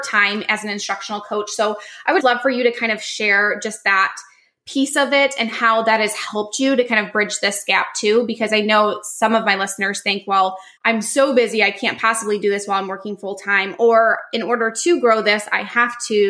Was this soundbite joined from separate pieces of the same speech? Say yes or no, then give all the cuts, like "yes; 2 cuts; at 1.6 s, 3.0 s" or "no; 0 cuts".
yes; 1 cut; at 2.2 s